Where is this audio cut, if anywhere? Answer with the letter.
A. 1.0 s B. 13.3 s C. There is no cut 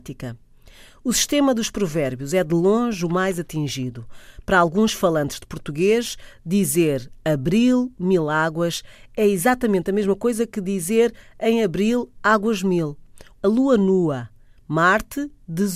B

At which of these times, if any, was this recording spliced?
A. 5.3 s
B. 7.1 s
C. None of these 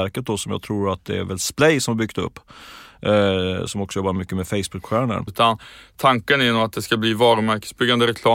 A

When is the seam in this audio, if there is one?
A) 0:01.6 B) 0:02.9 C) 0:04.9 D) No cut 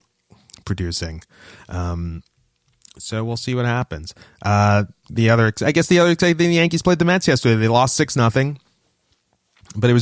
D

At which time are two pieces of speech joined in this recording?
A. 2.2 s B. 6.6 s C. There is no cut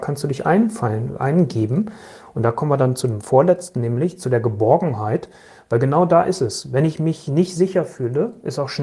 C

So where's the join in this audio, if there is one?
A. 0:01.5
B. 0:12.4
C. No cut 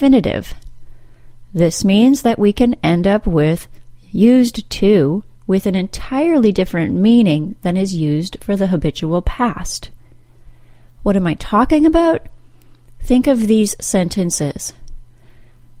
C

